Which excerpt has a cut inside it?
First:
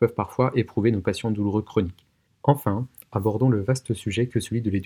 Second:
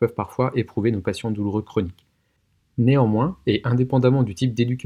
first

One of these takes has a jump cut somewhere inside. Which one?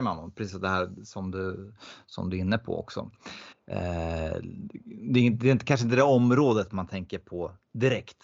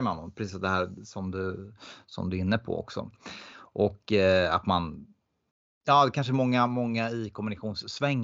first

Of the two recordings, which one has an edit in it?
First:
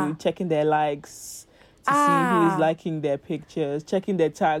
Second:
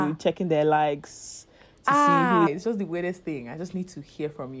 second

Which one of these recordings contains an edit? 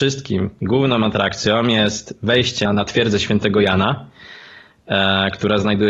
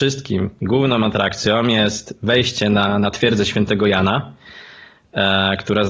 first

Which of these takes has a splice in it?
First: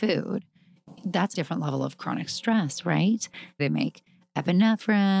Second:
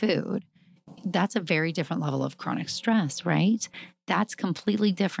first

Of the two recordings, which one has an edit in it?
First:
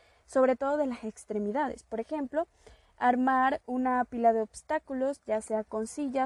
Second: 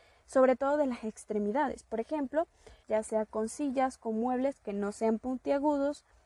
second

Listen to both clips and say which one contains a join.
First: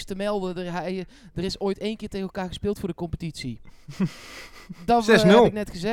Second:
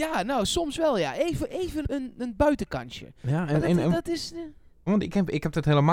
second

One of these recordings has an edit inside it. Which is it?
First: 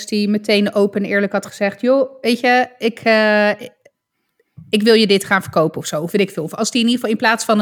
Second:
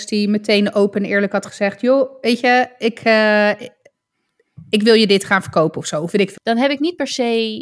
second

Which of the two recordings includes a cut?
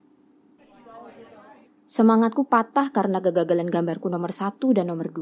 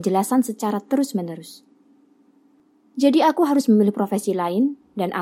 first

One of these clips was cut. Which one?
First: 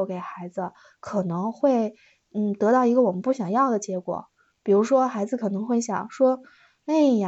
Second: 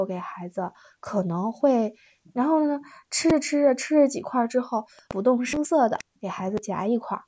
second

